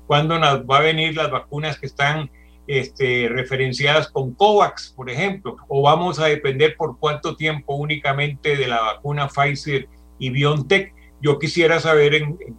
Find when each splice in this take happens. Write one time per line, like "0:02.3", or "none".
0:05.6
0:11.1